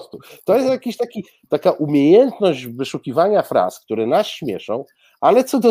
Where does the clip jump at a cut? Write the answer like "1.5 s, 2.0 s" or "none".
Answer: none